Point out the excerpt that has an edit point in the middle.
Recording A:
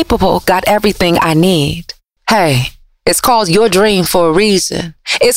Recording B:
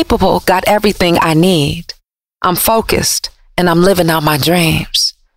A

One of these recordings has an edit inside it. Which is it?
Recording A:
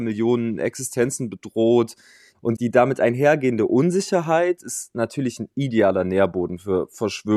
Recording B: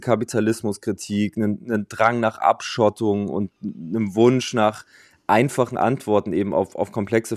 A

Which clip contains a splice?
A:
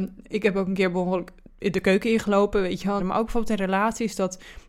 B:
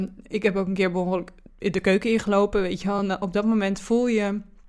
A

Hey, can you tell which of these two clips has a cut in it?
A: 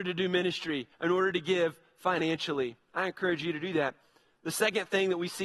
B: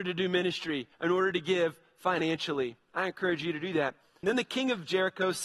B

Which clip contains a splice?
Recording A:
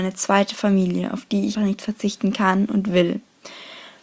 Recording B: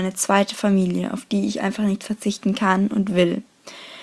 A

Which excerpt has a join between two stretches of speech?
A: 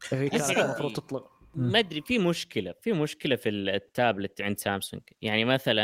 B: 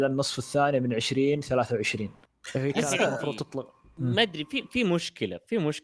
A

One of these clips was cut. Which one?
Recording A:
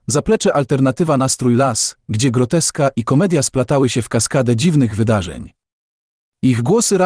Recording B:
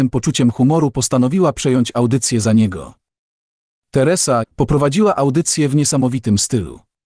B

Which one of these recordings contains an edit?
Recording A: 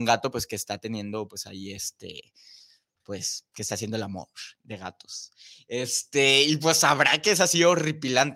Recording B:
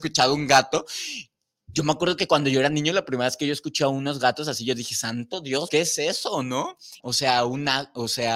B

